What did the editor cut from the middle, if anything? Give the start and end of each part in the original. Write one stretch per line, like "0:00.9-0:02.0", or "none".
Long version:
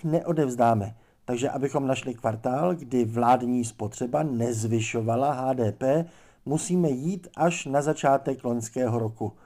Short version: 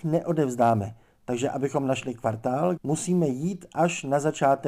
0:02.8-0:06.4